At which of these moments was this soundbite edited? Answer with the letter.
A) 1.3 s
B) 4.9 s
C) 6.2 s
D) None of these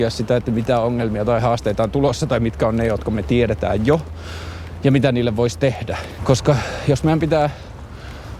C